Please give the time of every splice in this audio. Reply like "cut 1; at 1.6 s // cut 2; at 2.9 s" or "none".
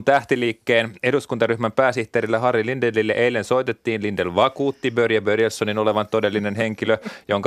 none